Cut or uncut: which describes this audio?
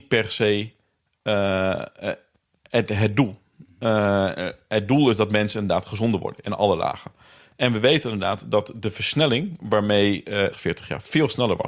cut